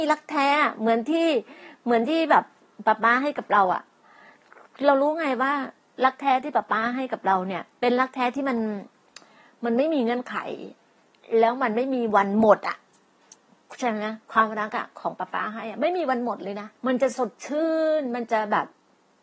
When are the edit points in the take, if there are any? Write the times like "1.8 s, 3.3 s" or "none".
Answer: 7.7 s, 16.8 s

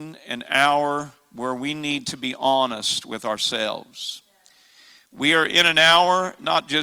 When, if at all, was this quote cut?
none

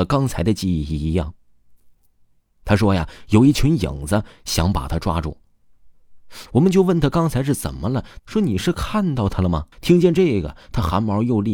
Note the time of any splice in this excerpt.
6.5 s, 8.2 s, 9.7 s

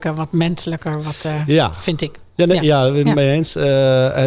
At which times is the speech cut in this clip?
none

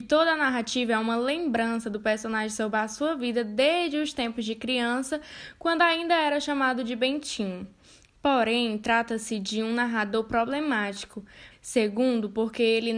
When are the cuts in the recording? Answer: 11.5 s

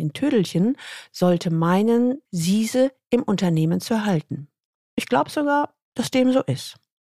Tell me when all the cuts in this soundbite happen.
2.2 s

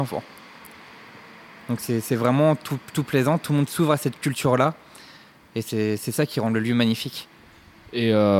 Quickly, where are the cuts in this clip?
none

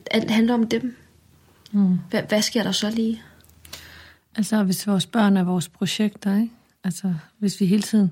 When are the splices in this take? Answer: none

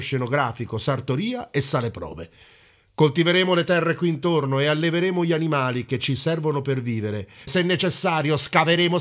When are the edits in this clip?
7.5 s

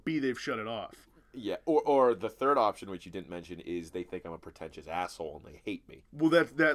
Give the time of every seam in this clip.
none

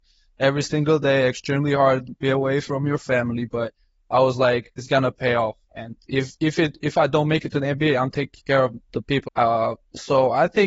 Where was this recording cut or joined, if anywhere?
4.8 s, 6.0 s, 9.3 s

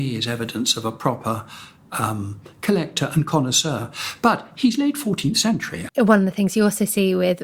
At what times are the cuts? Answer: 5.9 s

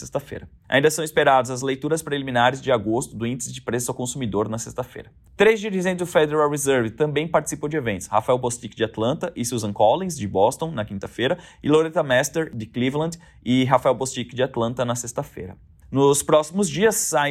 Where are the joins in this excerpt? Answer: 15.8 s

